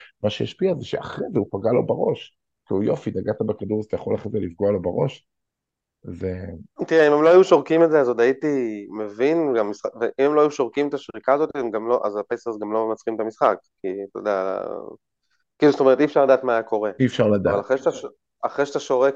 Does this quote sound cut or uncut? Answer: uncut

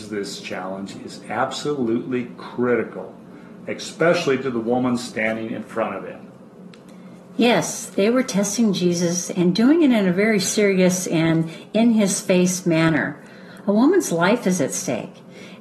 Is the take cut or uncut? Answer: uncut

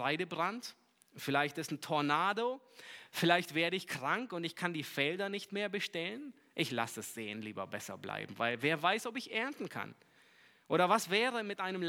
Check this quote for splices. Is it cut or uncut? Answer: uncut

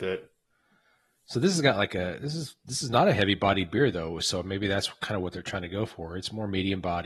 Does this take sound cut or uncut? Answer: uncut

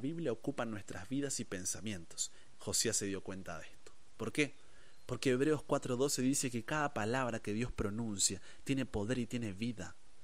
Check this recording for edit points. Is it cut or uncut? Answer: cut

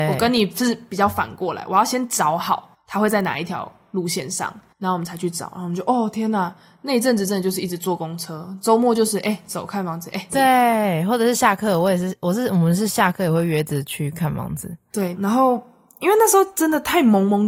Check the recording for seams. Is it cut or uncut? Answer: cut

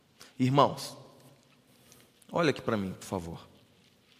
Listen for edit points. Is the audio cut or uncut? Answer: uncut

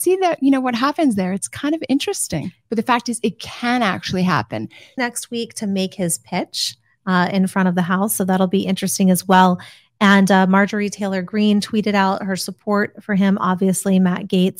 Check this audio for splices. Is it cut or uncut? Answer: cut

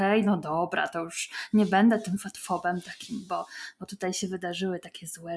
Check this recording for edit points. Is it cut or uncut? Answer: uncut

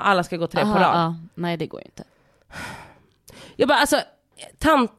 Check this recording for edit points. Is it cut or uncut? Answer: uncut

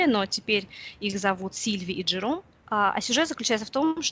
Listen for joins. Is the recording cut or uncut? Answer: uncut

